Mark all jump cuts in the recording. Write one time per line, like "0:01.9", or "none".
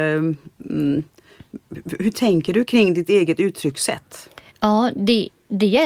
0:04.5